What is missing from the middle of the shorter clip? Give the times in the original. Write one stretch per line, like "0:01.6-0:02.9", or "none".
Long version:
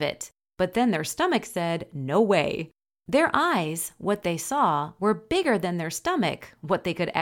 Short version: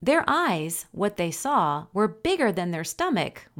none